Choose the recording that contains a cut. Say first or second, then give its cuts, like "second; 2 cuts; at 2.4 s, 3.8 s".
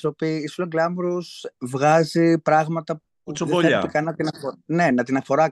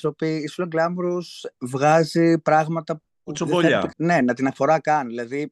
second; 1 cut; at 3.9 s